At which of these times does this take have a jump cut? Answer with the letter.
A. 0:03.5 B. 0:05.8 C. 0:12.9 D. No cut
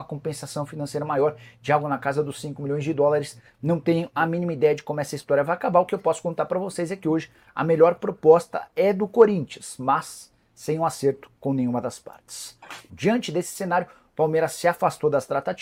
C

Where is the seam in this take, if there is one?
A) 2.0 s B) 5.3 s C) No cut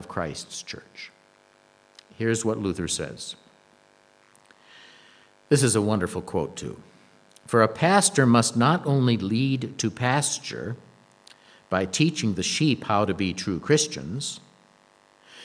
C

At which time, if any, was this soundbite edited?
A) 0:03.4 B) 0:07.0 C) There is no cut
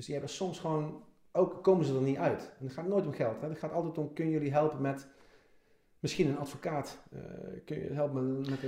C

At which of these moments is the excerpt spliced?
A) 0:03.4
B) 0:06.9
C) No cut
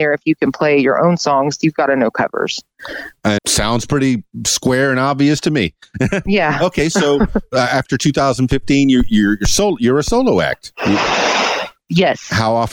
A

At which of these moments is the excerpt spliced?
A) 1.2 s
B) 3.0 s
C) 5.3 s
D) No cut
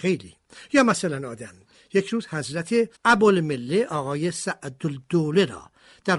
B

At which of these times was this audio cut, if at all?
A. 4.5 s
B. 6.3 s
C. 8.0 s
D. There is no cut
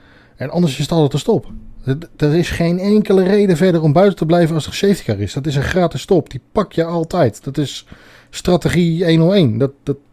D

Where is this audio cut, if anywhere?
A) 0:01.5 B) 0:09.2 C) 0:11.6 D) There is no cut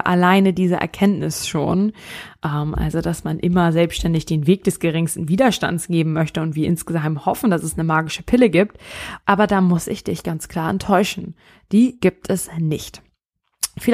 B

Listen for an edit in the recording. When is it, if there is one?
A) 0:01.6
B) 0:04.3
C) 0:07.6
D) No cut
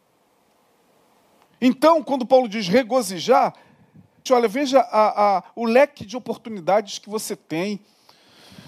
B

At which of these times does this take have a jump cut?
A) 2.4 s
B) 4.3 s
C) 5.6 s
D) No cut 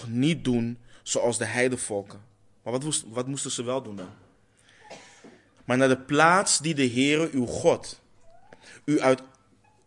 C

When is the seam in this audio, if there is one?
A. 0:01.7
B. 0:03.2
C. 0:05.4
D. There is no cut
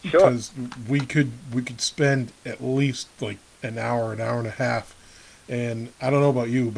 D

